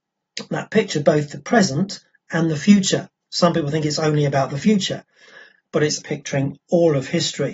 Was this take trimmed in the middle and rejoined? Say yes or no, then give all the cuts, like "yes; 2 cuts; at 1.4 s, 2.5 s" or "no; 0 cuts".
yes; 1 cut; at 6.0 s